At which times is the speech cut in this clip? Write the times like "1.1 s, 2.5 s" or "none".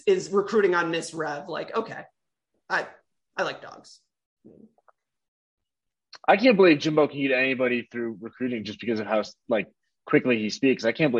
none